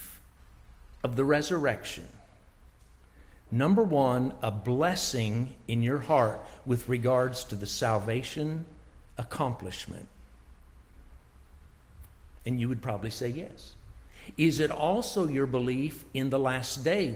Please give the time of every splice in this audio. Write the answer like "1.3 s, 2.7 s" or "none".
none